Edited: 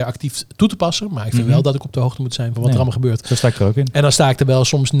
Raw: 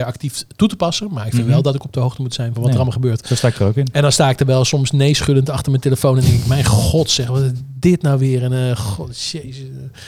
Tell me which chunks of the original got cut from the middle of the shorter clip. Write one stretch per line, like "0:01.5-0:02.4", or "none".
none